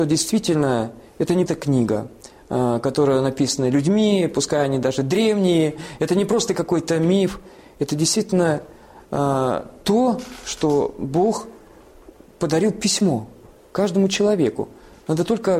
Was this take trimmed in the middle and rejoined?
yes; 1 cut; at 1.5 s

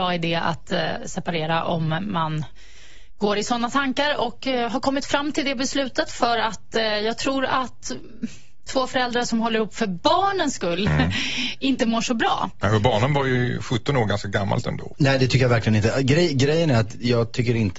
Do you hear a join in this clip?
yes; 1 cut; at 14.9 s

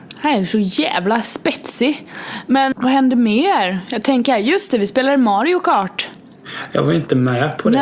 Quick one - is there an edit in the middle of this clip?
yes; 1 cut; at 2.7 s

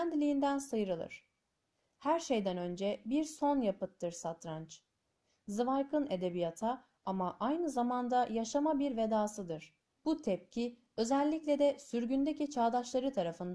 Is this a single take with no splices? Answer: no; 1 cut; at 10.0 s

